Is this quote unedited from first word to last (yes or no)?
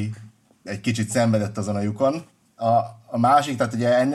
no